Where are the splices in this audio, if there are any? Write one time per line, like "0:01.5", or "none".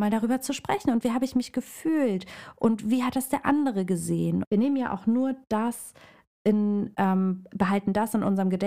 0:04.4